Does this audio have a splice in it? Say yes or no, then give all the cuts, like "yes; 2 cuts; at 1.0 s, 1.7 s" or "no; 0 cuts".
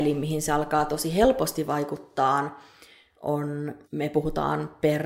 yes; 1 cut; at 3.8 s